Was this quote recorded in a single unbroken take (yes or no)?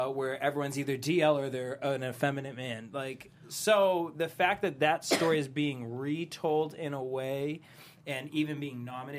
yes